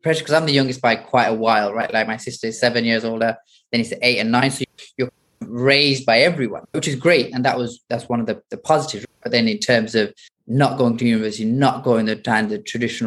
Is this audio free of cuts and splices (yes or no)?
yes